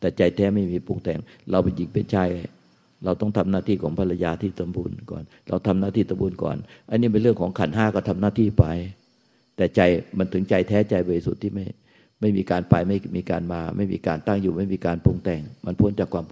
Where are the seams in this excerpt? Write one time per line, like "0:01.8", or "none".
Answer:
none